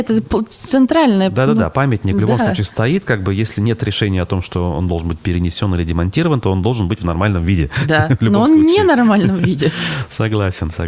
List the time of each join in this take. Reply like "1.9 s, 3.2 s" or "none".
none